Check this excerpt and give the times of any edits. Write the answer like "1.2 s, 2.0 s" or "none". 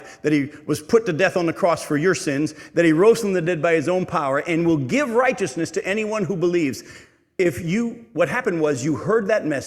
none